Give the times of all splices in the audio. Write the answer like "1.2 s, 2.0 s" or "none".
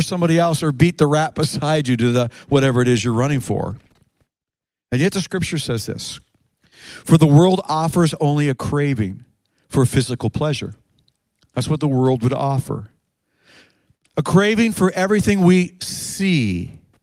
none